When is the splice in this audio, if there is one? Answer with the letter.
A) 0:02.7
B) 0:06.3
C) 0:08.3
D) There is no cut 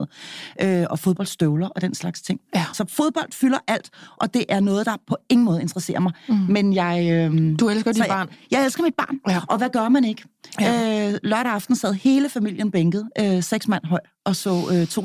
A